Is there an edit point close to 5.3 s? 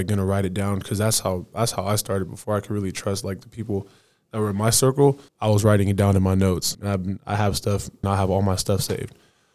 yes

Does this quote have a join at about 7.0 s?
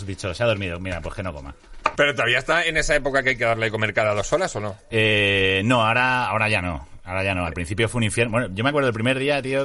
no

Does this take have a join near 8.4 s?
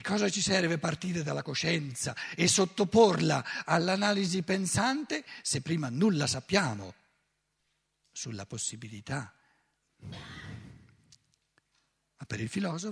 no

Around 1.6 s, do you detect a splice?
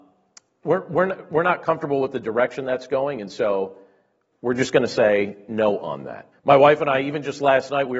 no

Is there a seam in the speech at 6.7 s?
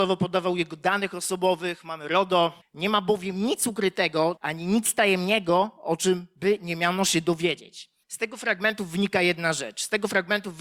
no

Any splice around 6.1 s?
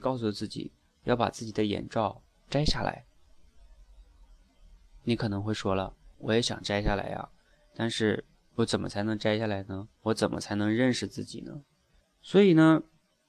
yes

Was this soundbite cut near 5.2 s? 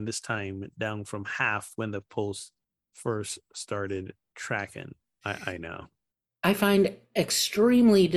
yes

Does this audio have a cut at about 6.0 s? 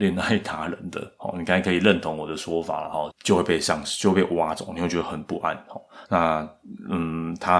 yes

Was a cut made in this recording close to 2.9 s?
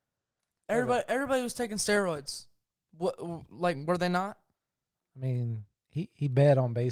no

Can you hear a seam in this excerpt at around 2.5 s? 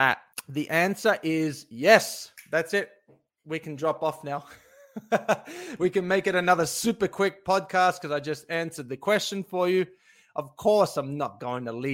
no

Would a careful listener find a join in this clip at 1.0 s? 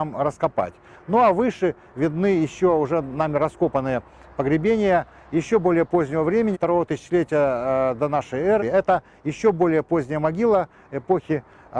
no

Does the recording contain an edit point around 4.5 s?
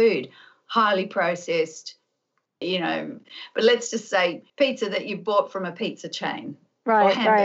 yes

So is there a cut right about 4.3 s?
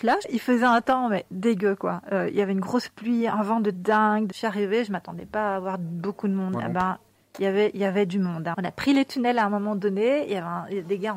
no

